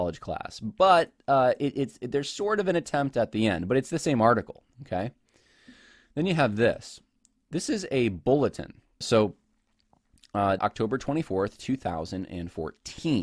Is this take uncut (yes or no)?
no